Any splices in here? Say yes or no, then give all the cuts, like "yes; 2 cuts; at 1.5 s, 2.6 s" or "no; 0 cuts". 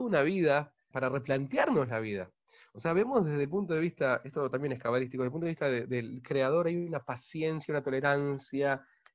yes; 1 cut; at 0.9 s